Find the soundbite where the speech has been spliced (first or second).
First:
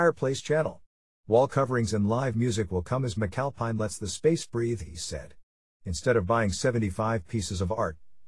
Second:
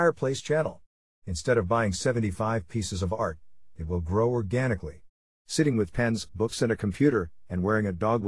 second